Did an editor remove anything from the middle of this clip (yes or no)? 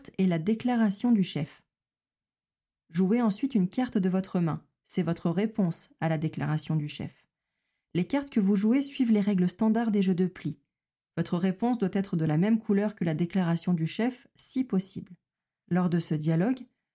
yes